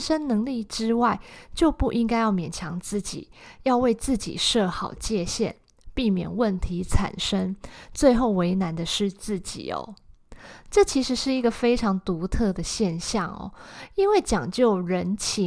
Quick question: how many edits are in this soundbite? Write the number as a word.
one